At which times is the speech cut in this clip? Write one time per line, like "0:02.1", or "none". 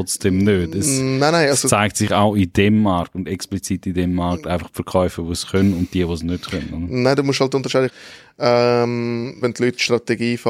0:07.9
0:09.4